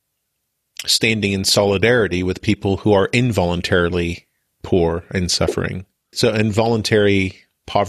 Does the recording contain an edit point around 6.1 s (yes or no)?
yes